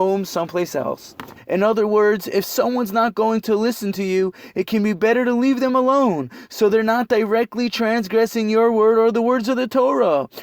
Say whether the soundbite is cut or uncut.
cut